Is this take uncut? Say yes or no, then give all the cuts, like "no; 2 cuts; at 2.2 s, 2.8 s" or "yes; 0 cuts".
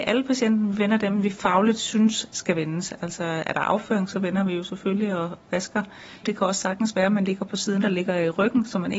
no; 2 cuts; at 6.2 s, 7.8 s